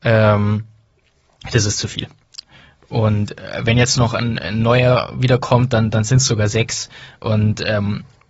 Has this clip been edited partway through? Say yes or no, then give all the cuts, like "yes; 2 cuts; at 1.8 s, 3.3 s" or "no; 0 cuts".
no; 0 cuts